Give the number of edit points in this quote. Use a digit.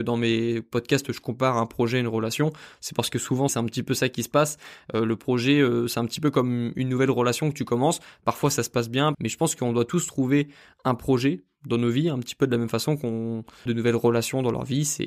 3